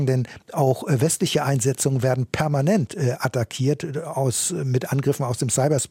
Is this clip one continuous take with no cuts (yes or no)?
yes